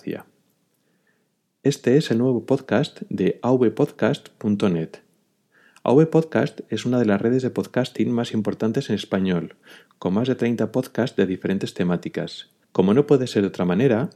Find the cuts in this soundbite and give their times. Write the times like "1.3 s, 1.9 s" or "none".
12.6 s